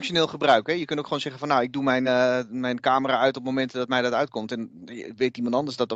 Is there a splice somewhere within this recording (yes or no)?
no